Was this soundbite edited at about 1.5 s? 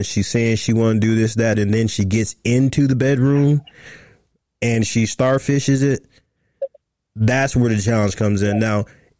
yes; 1 cut; at 1.5 s

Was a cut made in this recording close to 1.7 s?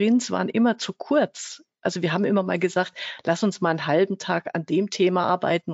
no; 0 cuts

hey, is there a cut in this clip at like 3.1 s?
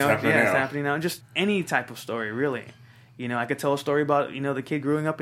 no; 1 cut; at 1.2 s

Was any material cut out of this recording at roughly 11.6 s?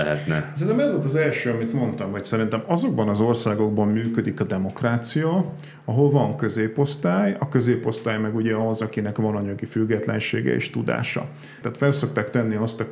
yes; 1 cut; at 11.6 s

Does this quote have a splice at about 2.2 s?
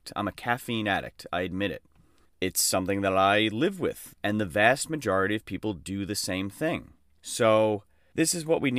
yes; 2 cuts; at 2.2 s, 4.1 s

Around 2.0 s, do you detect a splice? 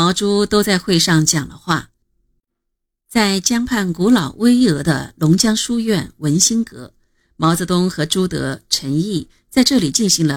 yes; 1 cut; at 2.0 s

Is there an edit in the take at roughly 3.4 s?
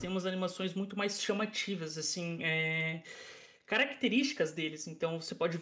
no; 0 cuts

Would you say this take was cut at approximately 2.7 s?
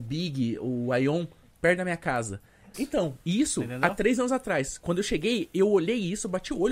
yes; 1 cut; at 2.7 s

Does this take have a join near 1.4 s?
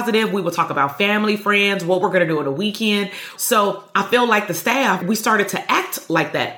no; 2 cuts; at 3.3 s, 5.0 s

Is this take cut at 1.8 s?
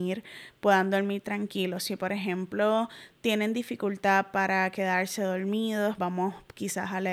no; 1 cut; at 6.0 s

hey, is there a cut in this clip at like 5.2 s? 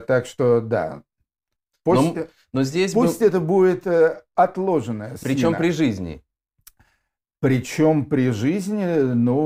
yes; 1 cut; at 5.2 s

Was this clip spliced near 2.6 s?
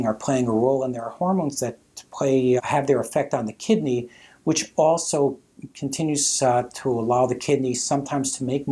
yes; 1 cut; at 2.6 s

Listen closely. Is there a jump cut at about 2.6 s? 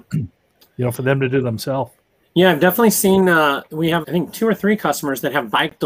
no; 1 cut; at 4.0 s

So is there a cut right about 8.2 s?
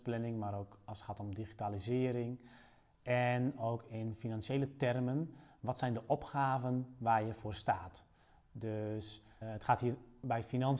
no; 1 cut; at 9.4 s

